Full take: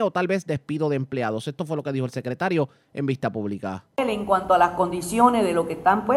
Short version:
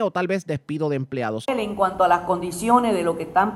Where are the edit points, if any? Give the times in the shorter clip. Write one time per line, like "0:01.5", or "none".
0:01.4